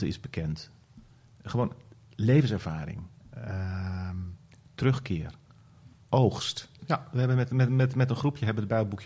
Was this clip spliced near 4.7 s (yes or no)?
no